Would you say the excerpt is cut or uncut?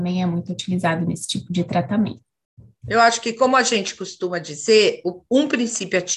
uncut